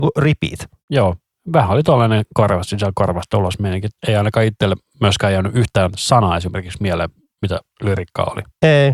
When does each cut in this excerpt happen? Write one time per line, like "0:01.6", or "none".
none